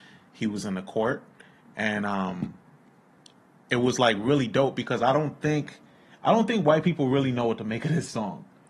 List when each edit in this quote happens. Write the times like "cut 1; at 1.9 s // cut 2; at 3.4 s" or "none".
none